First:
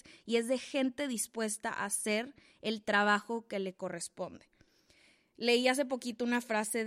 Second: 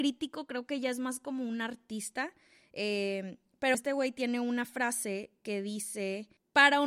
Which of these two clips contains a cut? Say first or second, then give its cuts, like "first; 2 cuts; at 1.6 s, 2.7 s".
second; 1 cut; at 3.7 s